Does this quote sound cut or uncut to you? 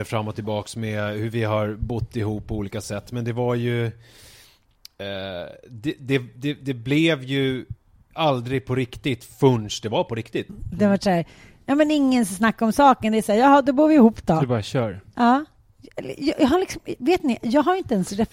cut